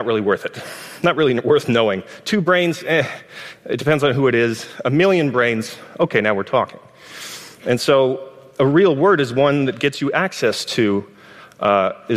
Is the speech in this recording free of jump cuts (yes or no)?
yes